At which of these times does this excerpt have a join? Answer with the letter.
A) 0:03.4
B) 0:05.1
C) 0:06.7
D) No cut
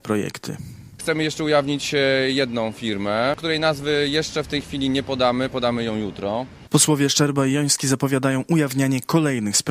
C